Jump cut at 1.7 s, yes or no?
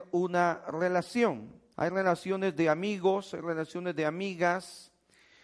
yes